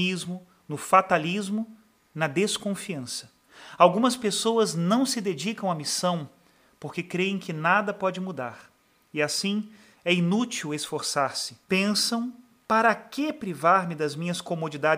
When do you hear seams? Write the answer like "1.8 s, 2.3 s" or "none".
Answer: 9.9 s, 11.6 s